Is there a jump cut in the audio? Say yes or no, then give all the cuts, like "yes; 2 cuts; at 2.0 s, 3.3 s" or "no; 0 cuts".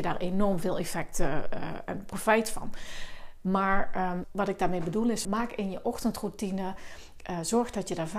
yes; 2 cuts; at 4.2 s, 5.2 s